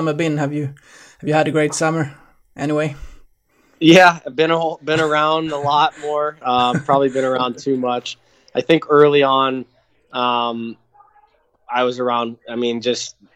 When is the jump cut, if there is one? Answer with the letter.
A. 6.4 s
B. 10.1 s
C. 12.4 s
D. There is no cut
A